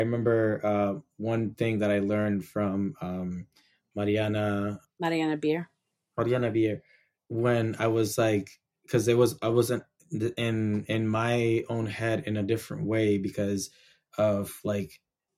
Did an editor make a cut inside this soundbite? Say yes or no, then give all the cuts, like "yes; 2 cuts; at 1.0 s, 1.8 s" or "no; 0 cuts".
no; 0 cuts